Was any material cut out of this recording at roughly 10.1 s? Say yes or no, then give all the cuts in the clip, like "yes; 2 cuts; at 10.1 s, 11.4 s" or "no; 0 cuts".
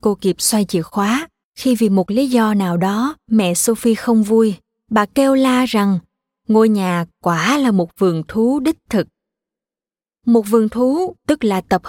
no; 1 cut; at 1.4 s